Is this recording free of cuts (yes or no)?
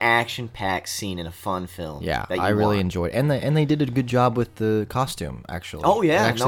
yes